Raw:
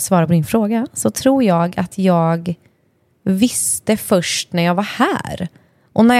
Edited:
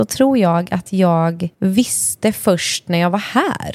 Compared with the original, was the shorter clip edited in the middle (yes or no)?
yes